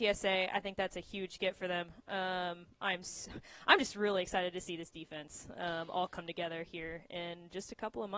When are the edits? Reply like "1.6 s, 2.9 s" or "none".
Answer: none